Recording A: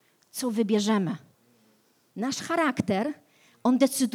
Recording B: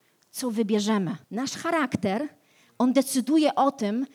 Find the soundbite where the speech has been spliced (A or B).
B